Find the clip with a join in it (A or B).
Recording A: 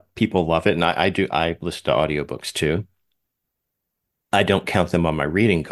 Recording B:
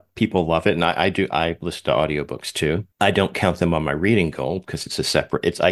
B